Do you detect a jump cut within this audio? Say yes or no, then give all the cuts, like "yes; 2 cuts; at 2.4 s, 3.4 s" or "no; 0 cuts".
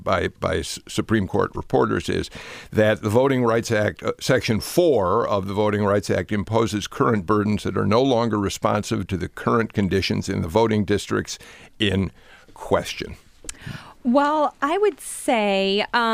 no; 0 cuts